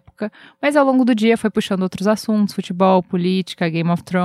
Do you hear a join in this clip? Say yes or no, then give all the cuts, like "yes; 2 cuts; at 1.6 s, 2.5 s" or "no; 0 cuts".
no; 0 cuts